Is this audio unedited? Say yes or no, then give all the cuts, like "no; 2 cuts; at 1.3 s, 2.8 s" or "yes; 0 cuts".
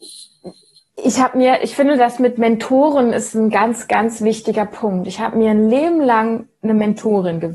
no; 1 cut; at 1.6 s